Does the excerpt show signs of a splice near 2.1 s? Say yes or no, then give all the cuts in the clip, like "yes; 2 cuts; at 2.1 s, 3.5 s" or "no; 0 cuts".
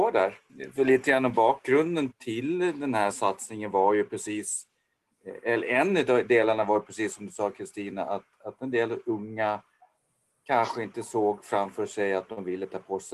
yes; 1 cut; at 2.1 s